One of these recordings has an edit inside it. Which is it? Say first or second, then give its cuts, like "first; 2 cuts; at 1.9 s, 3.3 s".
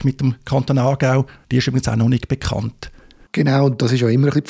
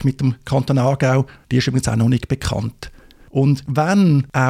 first; 1 cut; at 3.3 s